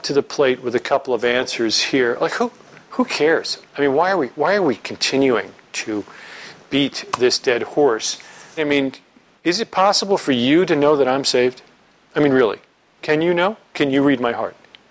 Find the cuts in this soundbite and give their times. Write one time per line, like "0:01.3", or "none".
0:03.6
0:08.6